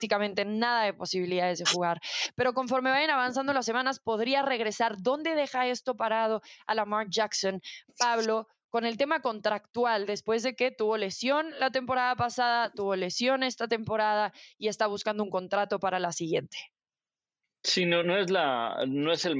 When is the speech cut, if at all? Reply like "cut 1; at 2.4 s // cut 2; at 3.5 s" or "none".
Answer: cut 1; at 18.0 s